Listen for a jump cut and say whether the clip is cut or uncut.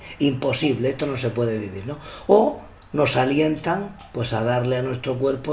uncut